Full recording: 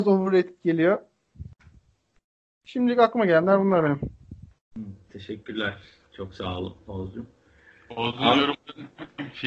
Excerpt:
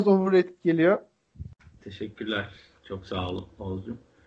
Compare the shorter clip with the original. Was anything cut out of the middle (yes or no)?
yes